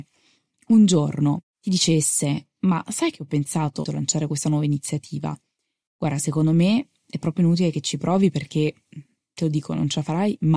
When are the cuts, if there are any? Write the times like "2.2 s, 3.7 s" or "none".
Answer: 3.8 s, 5.9 s